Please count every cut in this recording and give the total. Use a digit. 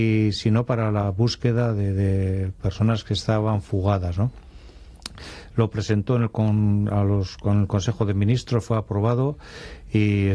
0